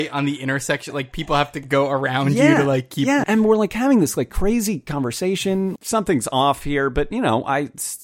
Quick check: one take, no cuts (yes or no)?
no